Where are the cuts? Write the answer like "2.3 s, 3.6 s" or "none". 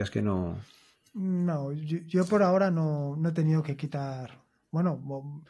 none

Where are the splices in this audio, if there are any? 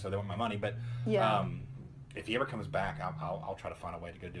none

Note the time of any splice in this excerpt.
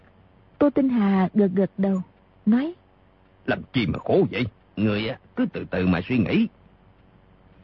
3.4 s, 4.7 s

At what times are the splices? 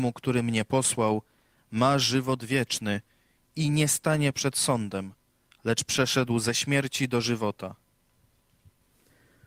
none

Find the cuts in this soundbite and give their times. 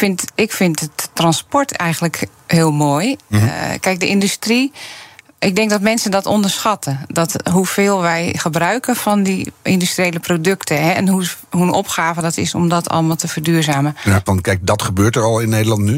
14.3 s

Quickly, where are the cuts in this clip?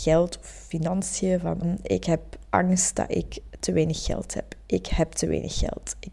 1.6 s

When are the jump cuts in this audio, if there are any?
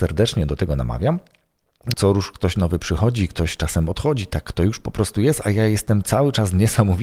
1.9 s

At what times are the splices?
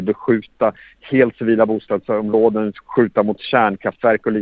2.8 s

